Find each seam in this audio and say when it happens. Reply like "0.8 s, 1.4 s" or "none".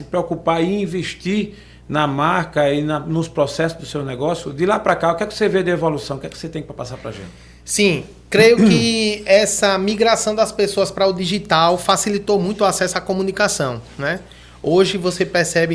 none